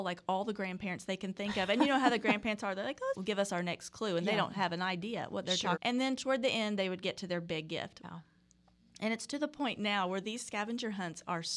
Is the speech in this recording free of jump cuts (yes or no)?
no